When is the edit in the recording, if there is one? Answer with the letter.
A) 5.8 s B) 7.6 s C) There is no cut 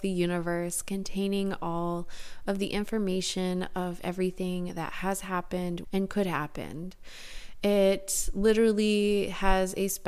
A